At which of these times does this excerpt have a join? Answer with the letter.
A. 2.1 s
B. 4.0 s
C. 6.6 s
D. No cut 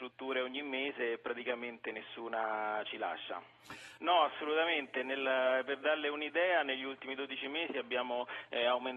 B